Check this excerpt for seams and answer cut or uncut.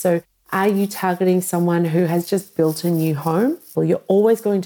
cut